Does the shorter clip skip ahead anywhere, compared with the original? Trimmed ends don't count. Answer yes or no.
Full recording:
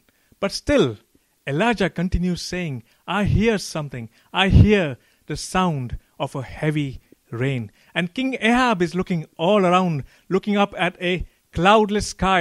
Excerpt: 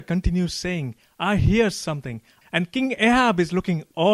yes